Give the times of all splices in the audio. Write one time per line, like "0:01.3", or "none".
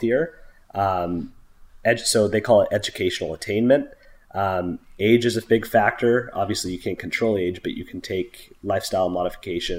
none